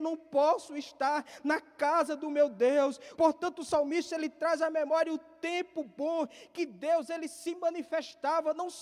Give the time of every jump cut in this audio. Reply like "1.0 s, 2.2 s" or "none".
3.2 s